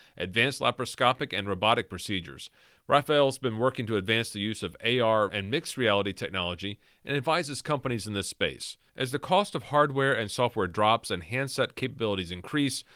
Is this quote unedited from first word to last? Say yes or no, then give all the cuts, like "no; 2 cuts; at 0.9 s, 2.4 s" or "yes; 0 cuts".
no; 2 cuts; at 5.3 s, 8.9 s